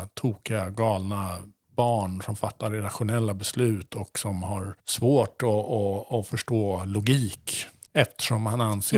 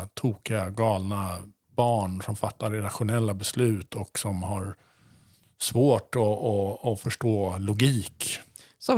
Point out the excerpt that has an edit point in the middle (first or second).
first